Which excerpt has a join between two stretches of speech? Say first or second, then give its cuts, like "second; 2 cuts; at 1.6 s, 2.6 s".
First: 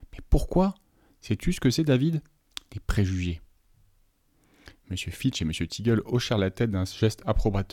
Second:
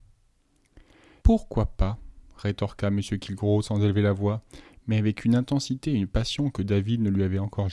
second; 1 cut; at 1.2 s